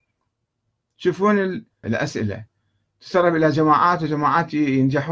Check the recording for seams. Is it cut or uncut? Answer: cut